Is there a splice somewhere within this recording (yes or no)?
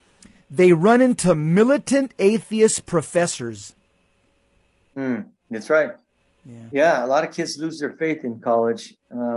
no